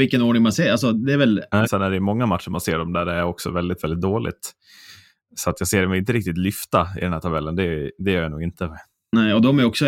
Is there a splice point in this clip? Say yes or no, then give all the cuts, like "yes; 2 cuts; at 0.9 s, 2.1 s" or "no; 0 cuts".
yes; 1 cut; at 1.7 s